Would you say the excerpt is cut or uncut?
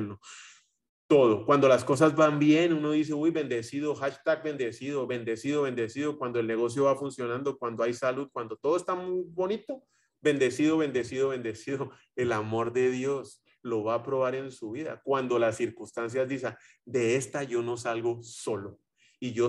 uncut